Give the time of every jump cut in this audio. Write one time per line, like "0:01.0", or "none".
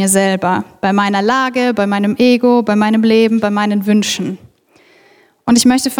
none